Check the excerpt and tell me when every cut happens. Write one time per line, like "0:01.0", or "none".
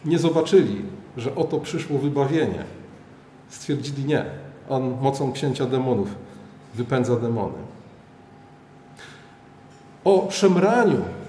none